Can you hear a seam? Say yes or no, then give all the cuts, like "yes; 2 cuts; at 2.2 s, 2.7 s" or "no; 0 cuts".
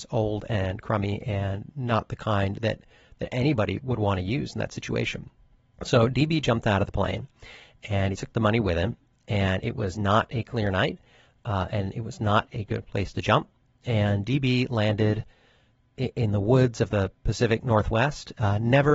no; 0 cuts